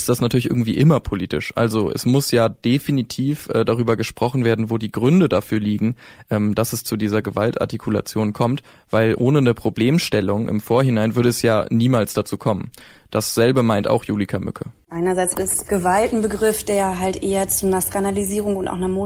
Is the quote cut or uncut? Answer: uncut